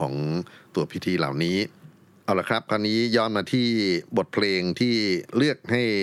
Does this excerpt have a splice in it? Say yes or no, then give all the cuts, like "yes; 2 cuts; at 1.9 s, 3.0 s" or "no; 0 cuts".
no; 0 cuts